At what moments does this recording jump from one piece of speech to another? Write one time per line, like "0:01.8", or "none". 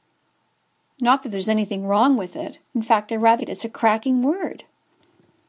0:03.4